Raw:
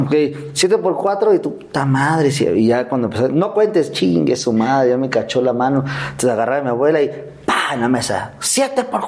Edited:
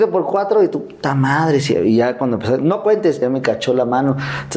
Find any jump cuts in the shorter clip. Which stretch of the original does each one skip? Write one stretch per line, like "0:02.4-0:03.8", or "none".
0:03.9-0:04.9

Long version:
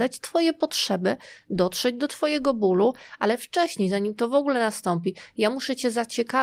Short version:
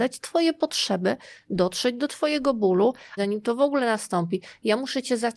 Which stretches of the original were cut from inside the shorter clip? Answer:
0:03.2-0:03.9

